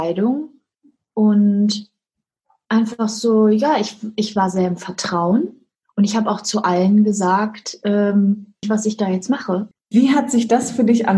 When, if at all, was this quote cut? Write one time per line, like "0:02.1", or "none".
0:08.6
0:09.7